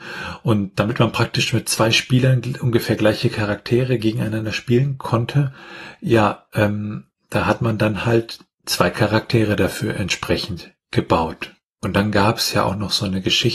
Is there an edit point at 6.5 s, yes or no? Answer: no